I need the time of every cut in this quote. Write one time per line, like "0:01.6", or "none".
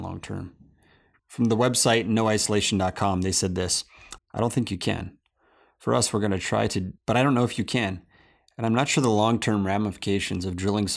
0:01.2
0:04.2
0:07.0